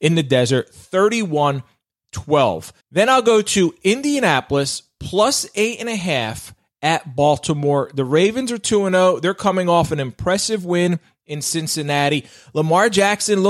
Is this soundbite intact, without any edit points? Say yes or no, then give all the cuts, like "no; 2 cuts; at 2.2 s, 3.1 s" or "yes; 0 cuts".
no; 1 cut; at 2.8 s